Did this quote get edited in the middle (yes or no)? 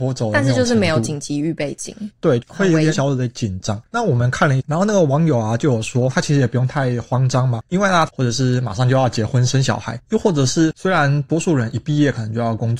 yes